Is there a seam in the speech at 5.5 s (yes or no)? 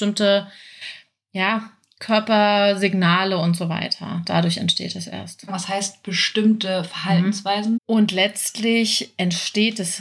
yes